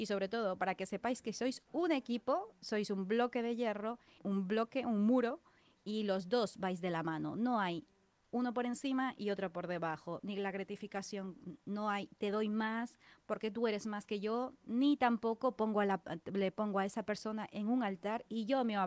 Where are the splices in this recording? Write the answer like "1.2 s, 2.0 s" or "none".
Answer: 4.2 s